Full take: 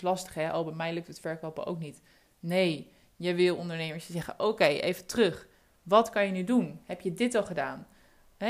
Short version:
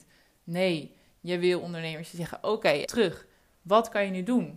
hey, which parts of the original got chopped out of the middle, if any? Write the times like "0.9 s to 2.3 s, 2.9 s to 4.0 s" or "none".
4.8 s to 5.1 s